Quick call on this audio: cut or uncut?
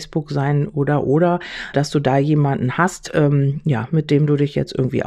cut